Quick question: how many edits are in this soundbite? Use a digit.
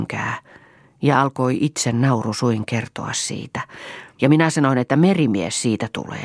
1